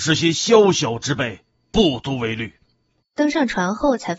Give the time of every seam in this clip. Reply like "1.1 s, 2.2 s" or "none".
3.0 s